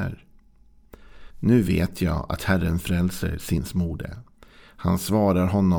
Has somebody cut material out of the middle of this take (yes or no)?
no